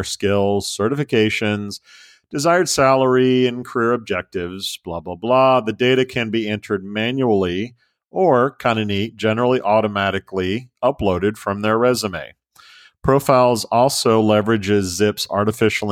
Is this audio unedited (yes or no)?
yes